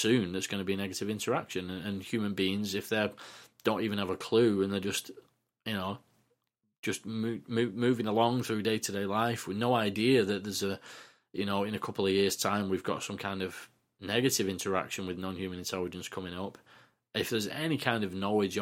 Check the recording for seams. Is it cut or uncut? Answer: uncut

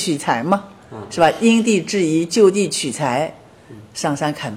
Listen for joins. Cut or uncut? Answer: uncut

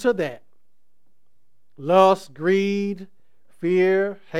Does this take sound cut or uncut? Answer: uncut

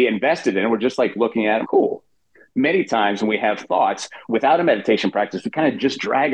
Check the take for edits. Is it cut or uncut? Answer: cut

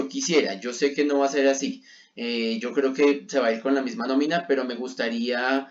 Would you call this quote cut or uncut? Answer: uncut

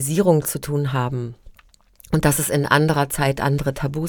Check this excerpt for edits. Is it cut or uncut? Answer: uncut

